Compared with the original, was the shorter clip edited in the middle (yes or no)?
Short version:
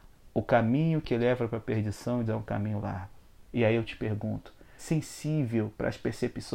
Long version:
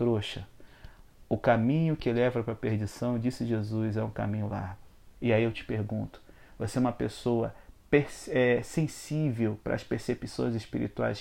yes